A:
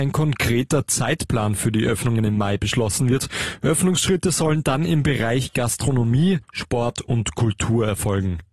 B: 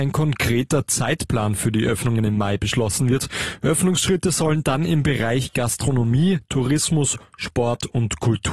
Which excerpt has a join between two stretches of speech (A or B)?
A